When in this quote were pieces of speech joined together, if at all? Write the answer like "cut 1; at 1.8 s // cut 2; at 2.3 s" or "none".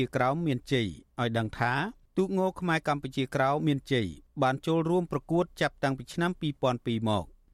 cut 1; at 3.6 s